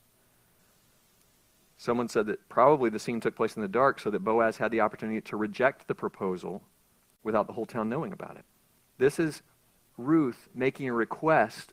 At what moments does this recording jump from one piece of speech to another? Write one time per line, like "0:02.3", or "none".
0:08.9